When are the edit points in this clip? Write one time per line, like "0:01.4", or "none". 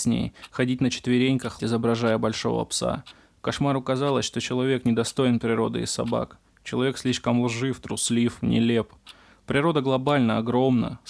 0:01.6